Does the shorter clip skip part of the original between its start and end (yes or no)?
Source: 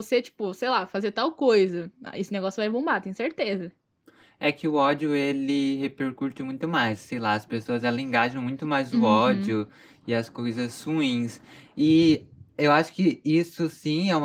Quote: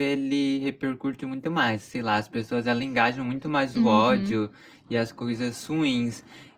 no